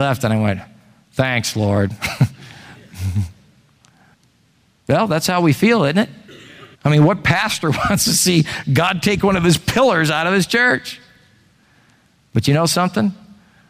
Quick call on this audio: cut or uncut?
cut